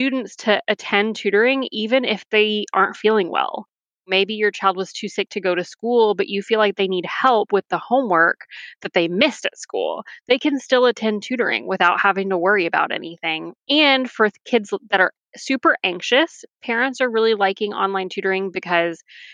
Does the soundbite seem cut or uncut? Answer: uncut